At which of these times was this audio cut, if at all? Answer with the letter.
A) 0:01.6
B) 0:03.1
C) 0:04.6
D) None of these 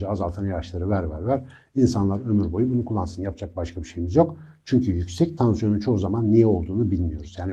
D